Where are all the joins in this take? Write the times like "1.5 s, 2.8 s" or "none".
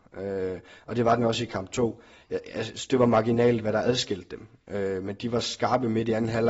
none